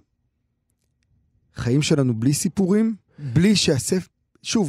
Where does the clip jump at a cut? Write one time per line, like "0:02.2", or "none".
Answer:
0:03.1